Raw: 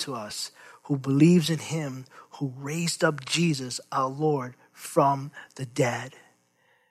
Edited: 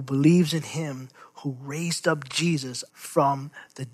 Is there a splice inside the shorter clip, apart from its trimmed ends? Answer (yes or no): yes